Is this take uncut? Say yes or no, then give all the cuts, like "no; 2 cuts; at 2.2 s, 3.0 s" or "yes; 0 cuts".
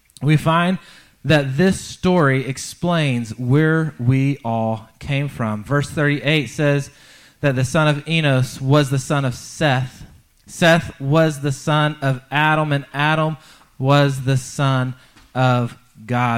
yes; 0 cuts